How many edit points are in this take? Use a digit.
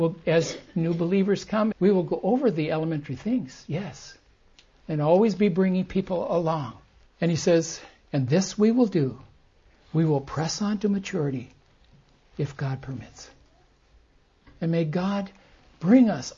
2